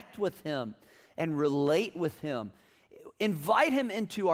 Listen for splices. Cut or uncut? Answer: uncut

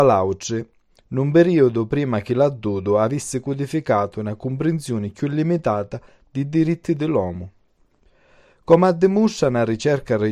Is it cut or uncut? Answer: uncut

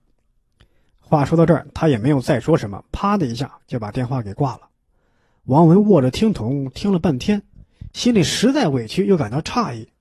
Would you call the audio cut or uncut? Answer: uncut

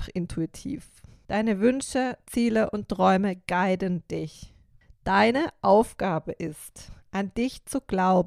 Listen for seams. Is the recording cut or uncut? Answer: cut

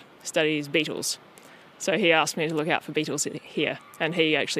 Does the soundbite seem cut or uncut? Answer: uncut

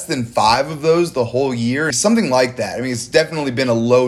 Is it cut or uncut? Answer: cut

